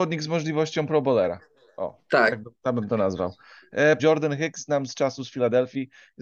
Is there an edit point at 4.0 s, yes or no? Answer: yes